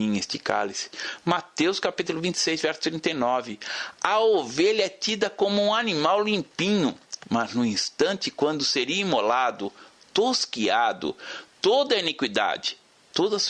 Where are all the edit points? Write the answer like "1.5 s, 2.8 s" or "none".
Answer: none